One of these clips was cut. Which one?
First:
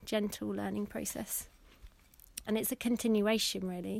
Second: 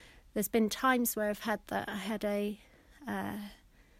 first; 1 cut; at 2.5 s

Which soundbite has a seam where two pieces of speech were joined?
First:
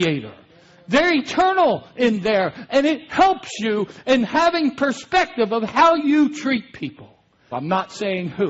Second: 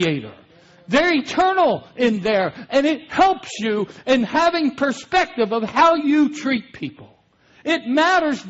first; 1 cut; at 7.5 s

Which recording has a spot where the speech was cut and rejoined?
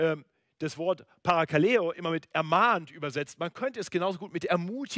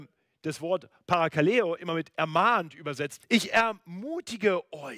second; 1 cut; at 3.2 s

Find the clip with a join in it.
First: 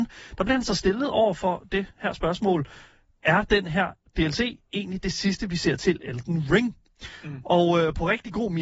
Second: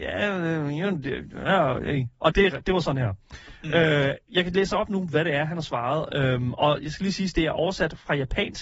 second; 1 cut; at 2.3 s

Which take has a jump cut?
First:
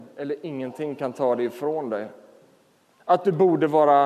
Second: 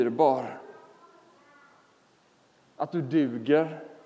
first; 1 cut; at 3.0 s

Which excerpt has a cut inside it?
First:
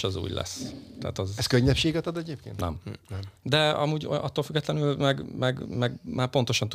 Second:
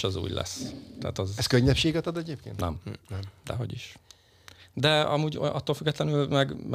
first; 1 cut; at 3.4 s

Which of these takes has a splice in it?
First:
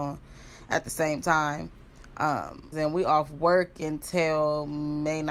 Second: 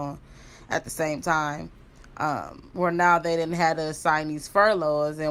first; 1 cut; at 2.7 s

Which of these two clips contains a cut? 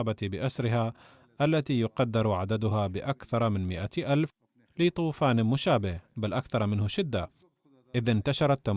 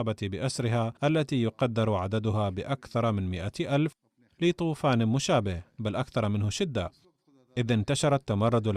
second; 1 cut; at 1.0 s

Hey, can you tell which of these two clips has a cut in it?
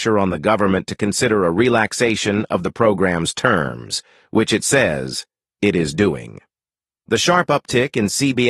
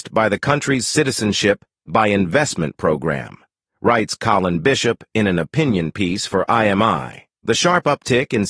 first; 1 cut; at 7.0 s

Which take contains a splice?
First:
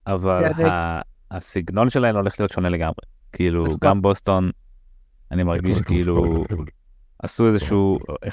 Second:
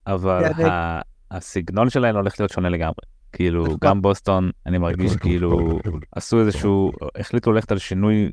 second; 2 cuts; at 4.6 s, 6.1 s

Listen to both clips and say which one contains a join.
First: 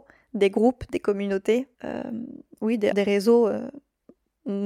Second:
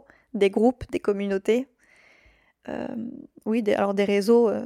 first; 2 cuts; at 1.7 s, 2.9 s

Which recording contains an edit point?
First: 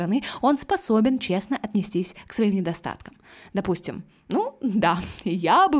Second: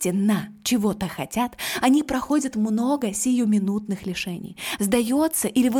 second; 1 cut; at 4.8 s

